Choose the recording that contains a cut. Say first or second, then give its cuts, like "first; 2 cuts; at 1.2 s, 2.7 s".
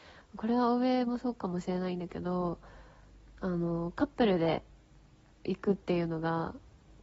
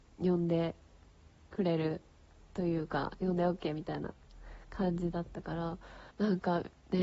second; 1 cut; at 6.1 s